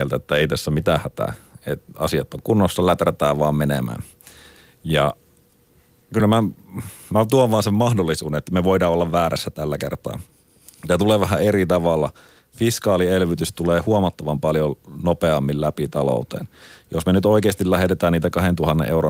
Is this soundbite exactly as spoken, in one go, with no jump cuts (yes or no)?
yes